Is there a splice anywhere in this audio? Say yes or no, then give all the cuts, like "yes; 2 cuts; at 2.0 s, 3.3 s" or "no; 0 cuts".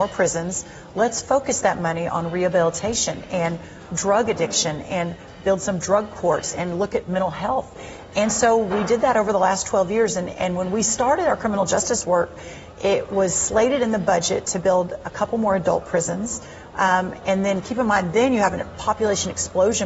no; 0 cuts